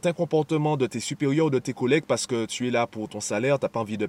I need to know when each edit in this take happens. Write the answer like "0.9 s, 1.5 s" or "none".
none